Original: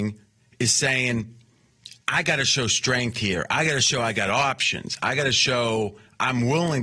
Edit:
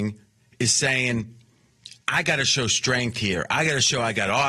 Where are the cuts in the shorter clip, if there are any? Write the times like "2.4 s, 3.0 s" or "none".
none